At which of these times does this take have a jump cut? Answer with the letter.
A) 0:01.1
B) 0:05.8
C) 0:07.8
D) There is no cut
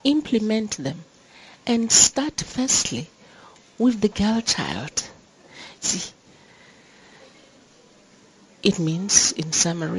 B